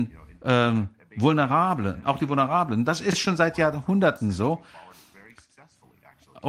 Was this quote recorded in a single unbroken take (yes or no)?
yes